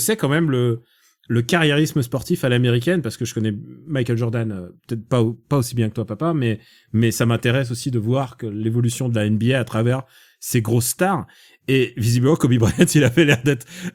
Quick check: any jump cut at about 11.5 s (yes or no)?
no